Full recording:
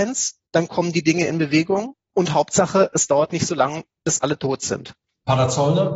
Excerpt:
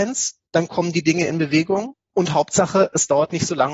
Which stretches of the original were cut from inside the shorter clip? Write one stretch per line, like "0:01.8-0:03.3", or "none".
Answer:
none

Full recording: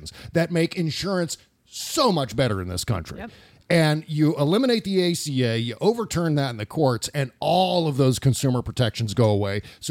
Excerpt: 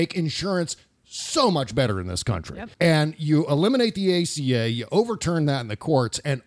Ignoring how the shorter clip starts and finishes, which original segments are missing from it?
0:03.3-0:03.6

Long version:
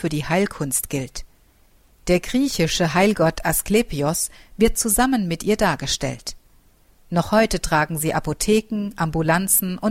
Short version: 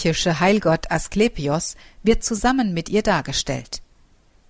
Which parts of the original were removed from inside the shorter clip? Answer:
none

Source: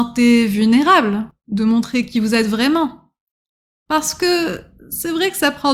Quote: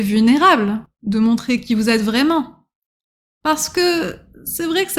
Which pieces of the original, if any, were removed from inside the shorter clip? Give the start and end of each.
none

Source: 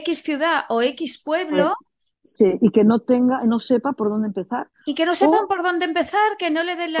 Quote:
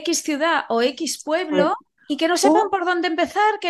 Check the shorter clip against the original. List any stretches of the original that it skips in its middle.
0:02.0-0:04.8

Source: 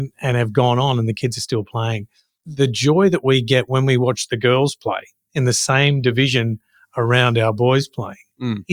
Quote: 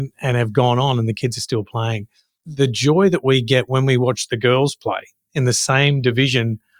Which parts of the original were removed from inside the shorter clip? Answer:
none

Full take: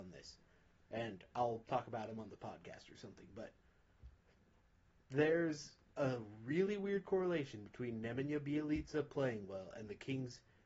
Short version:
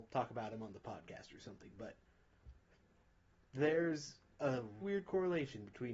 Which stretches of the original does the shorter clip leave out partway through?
0:06.4-0:06.8

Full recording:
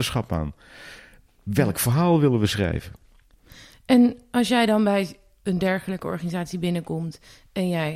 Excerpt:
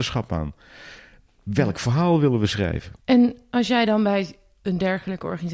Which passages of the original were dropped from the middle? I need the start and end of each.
0:03.0-0:03.8

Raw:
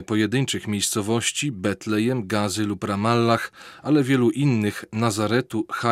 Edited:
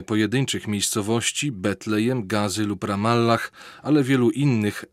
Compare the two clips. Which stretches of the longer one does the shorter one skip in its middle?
none

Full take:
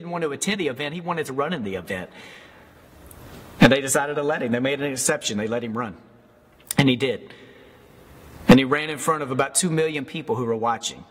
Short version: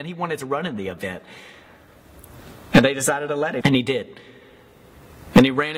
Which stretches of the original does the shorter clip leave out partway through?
0:04.5-0:06.7

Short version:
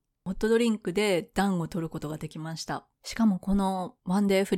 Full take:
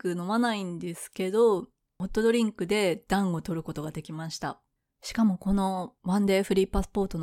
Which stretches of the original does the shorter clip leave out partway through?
0:04.7-0:04.9

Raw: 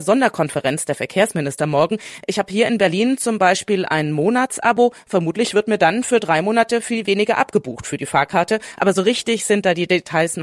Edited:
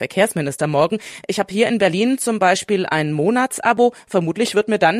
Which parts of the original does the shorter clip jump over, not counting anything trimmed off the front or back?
none

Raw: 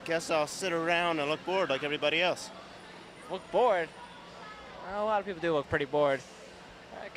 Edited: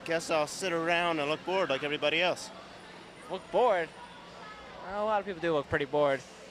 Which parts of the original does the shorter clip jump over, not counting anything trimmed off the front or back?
none

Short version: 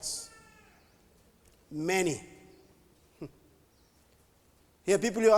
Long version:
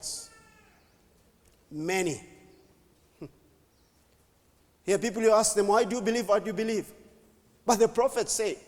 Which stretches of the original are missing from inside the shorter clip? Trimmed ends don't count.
none

